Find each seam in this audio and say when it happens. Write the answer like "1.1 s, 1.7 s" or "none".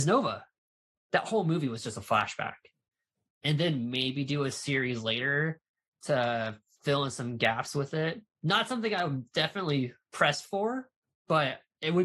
0.9 s, 3.3 s